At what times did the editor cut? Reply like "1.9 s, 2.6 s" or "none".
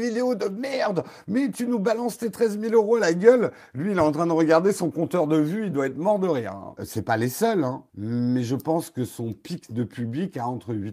6.8 s, 7.9 s